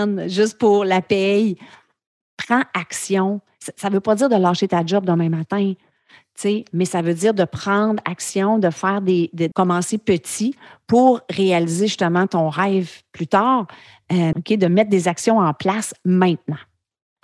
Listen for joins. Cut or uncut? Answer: cut